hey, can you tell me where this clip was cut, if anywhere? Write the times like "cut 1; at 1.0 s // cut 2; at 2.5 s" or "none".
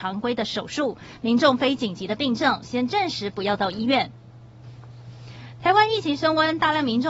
cut 1; at 1.2 s